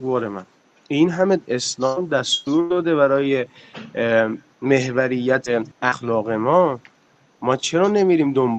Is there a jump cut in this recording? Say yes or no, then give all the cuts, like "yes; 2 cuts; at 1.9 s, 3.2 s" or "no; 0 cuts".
yes; 1 cut; at 5.7 s